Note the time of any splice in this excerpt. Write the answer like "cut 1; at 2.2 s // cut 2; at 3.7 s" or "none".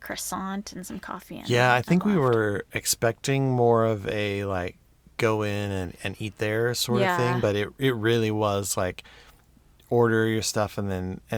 none